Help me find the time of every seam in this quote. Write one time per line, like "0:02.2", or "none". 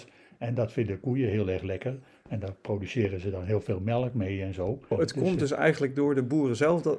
0:04.9